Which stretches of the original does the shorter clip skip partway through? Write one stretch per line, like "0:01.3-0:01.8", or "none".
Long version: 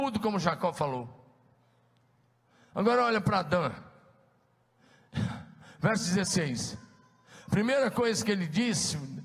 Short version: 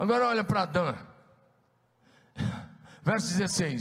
none